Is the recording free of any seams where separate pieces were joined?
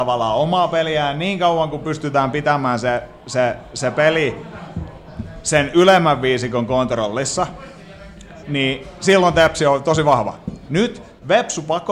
no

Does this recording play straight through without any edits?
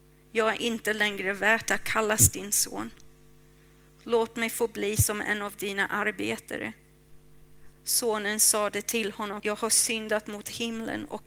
no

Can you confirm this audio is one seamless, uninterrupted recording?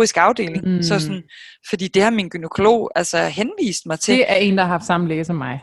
yes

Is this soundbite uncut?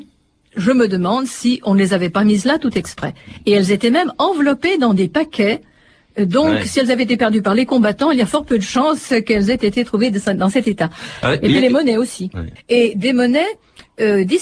no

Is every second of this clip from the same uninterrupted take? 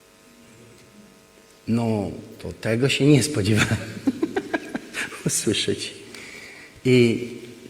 yes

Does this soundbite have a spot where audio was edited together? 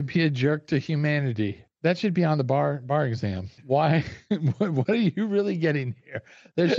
yes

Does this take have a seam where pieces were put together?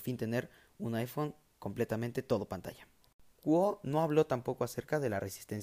yes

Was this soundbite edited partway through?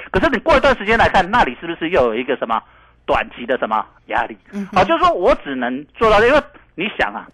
no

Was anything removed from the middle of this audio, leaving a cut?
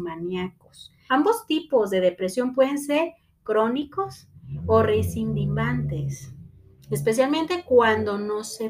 yes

